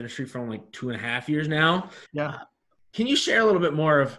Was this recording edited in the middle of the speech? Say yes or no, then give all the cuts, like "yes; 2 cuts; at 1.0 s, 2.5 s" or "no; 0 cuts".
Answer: yes; 1 cut; at 2.1 s